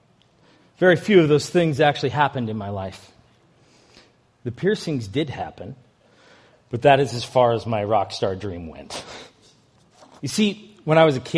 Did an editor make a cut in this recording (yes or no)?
yes